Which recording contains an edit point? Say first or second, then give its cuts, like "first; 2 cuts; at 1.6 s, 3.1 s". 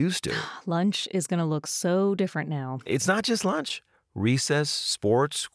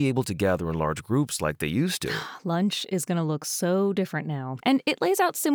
second; 1 cut; at 4.6 s